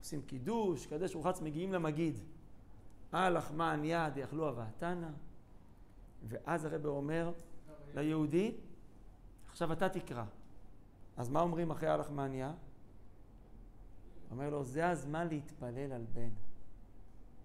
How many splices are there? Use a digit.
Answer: 1